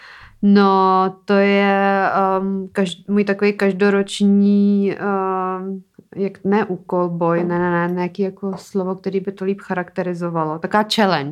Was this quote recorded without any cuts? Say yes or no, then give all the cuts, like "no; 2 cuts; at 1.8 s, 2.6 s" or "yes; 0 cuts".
yes; 0 cuts